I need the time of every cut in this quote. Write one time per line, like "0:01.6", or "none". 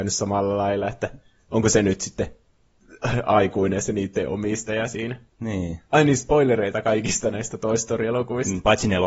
0:05.9